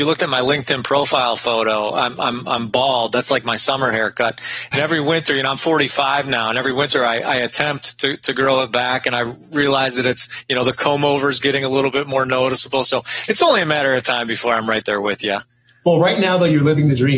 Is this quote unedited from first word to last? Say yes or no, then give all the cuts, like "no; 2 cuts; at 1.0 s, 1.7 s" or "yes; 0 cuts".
yes; 0 cuts